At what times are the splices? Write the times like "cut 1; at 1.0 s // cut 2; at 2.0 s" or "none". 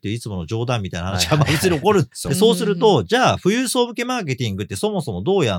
cut 1; at 2.3 s